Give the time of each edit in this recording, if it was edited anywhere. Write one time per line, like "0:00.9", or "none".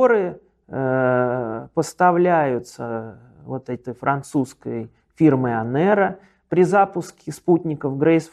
none